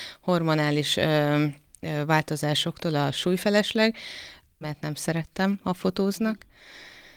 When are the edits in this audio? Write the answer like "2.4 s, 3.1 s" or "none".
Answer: 4.6 s